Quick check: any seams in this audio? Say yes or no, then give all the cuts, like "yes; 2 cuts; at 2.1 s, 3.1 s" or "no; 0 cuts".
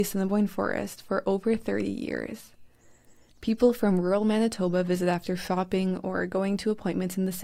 yes; 1 cut; at 3.3 s